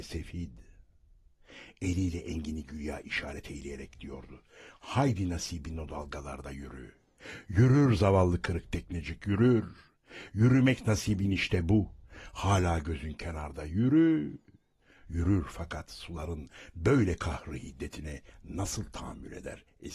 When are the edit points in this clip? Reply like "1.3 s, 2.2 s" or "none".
none